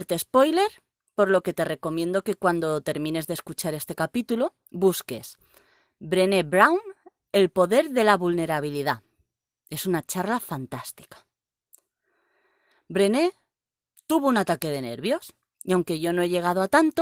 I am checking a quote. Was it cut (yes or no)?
no